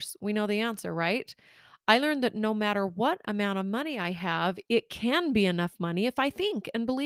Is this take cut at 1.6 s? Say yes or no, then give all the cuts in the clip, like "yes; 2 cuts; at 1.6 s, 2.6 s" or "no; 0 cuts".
no; 0 cuts